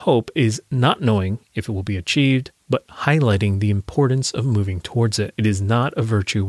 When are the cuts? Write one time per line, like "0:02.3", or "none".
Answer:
none